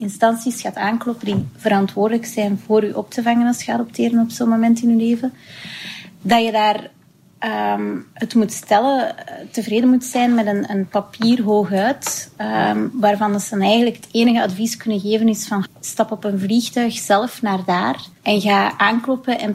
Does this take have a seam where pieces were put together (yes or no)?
yes